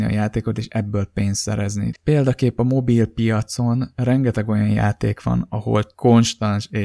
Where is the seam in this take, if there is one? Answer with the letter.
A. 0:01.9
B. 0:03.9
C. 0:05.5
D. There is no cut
A